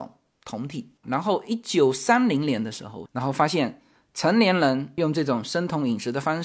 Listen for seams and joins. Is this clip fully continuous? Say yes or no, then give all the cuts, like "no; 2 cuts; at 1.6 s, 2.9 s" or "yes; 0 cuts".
no; 2 cuts; at 1.0 s, 3.1 s